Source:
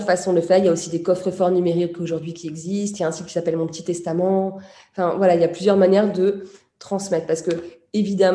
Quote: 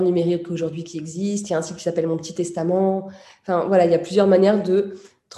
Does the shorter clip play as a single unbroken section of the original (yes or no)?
yes